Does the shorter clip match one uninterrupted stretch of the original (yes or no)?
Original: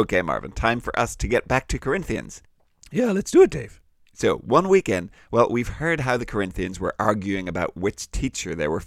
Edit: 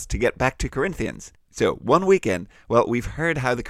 no